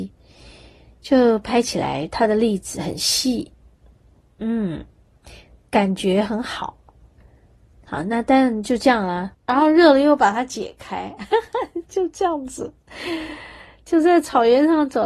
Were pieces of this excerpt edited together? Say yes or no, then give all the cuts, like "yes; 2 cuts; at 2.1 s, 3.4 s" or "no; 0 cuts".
yes; 1 cut; at 9.3 s